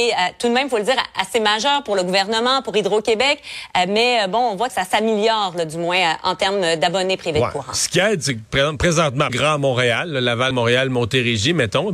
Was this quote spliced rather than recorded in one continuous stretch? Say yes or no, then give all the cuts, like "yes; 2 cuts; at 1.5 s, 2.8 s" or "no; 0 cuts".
yes; 3 cuts; at 4.7 s, 9.3 s, 10.5 s